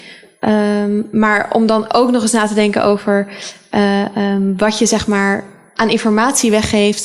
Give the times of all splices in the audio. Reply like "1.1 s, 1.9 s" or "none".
none